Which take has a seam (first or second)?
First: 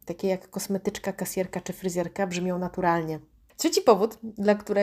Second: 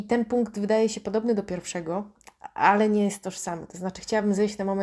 first